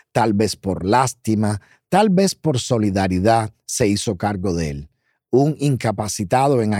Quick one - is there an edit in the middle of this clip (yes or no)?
no